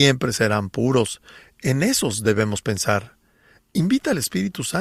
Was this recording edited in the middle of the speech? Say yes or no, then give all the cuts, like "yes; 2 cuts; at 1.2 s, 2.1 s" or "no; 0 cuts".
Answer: no; 0 cuts